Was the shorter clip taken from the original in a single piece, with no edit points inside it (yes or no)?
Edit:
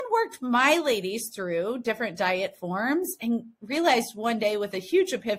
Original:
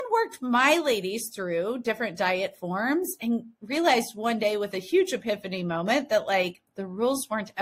yes